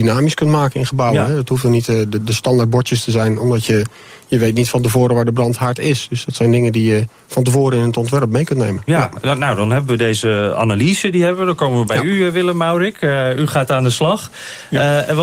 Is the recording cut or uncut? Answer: uncut